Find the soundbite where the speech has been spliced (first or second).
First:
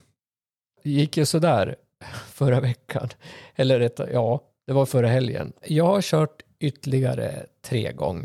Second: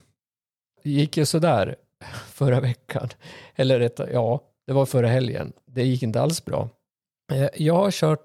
first